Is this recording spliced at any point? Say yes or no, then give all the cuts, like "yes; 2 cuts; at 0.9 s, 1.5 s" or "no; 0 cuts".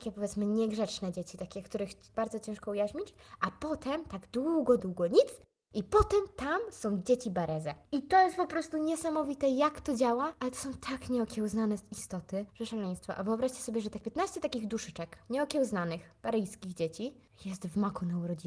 yes; 1 cut; at 4.8 s